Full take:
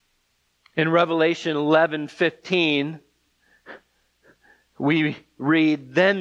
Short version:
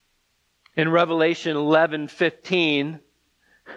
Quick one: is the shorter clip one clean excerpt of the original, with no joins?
yes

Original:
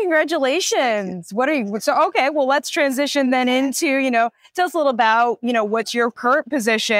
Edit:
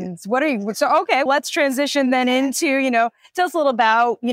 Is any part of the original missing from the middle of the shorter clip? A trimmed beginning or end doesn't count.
yes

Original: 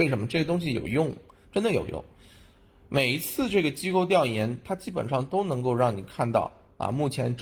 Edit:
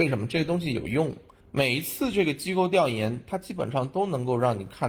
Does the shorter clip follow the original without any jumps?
no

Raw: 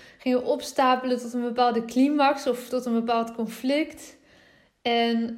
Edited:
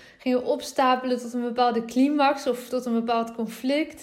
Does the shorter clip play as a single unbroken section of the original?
yes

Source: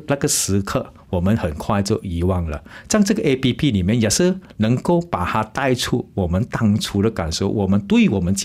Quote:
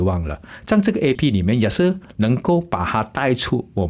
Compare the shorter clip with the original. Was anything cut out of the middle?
yes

